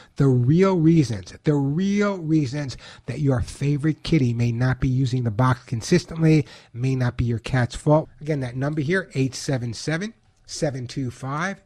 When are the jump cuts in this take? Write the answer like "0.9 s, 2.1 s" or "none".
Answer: 8.0 s